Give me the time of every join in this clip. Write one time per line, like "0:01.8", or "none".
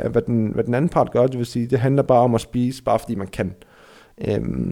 none